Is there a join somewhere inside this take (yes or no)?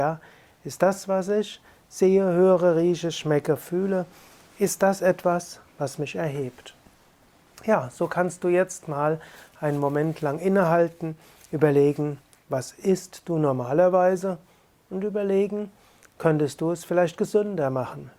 no